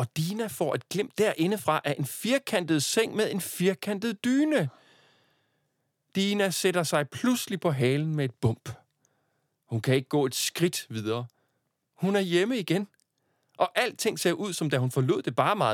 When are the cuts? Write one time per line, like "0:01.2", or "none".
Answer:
none